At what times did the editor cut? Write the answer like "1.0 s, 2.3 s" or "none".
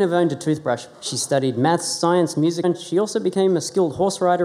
0.9 s, 2.6 s